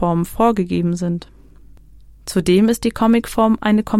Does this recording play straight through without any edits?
yes; 0 cuts

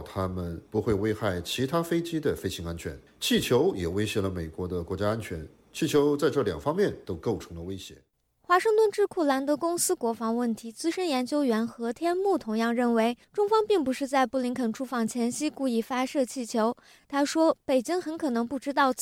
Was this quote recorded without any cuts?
yes; 0 cuts

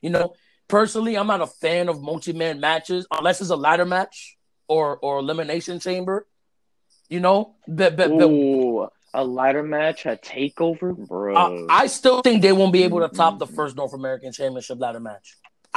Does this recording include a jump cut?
no; 0 cuts

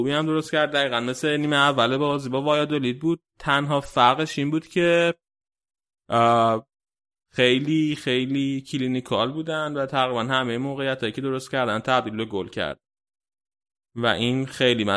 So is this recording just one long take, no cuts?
yes; 0 cuts

